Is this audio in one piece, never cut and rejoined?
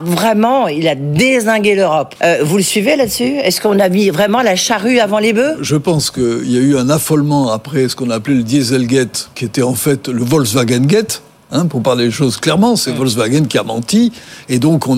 no; 2 cuts; at 2.2 s, 5.6 s

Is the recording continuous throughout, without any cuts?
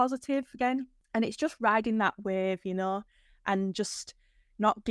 yes; 0 cuts

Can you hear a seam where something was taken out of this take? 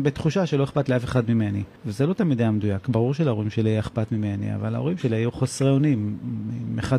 yes; 1 cut; at 1.8 s

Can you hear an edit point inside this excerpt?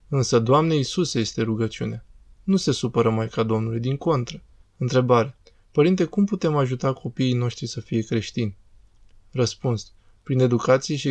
yes; 1 cut; at 4.6 s

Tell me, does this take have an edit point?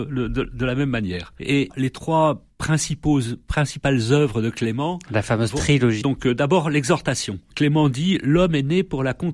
yes; 1 cut; at 6.0 s

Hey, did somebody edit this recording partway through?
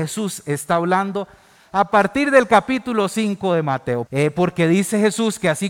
yes; 1 cut; at 4.1 s

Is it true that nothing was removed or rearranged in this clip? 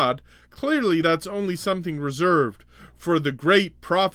yes; 0 cuts

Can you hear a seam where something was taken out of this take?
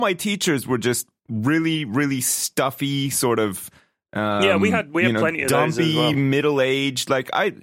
no; 0 cuts

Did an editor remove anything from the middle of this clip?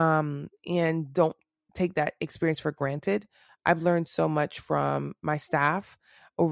no; 0 cuts

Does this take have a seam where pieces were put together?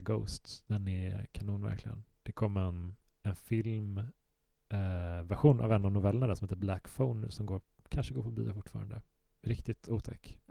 no; 0 cuts

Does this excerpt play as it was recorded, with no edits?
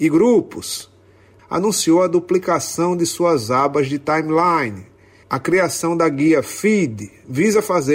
no; 1 cut; at 1.4 s

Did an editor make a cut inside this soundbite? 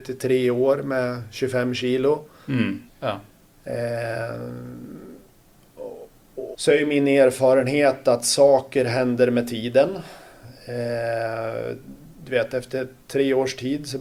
yes; 2 cuts; at 2.9 s, 6.5 s

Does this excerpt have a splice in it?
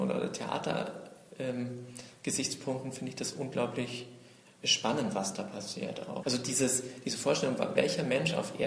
yes; 2 cuts; at 6.2 s, 7.8 s

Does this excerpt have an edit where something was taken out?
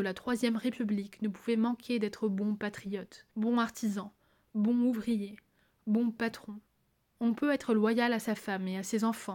yes; 2 cuts; at 3.3 s, 7.1 s

